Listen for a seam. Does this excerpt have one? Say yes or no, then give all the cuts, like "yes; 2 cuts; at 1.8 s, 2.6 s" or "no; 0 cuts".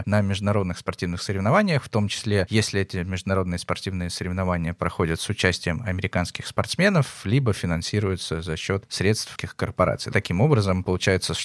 yes; 1 cut; at 9.4 s